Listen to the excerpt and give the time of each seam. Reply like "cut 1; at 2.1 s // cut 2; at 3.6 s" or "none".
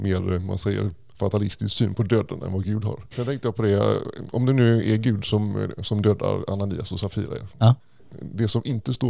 cut 1; at 3.1 s